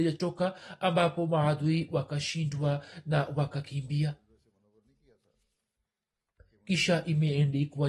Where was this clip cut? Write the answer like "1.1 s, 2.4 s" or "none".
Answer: none